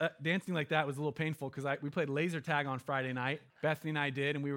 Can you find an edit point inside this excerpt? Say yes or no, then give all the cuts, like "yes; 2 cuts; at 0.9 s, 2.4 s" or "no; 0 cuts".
yes; 1 cut; at 3.5 s